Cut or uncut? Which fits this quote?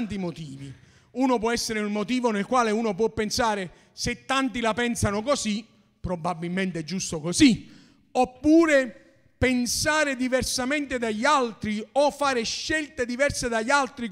uncut